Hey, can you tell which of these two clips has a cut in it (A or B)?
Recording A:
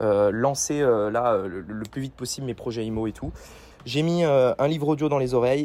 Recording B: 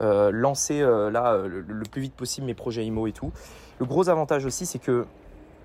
A